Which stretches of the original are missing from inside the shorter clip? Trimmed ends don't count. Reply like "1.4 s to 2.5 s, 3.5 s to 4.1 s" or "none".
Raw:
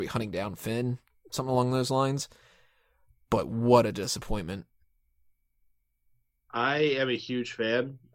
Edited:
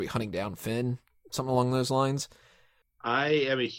2.8 s to 6.3 s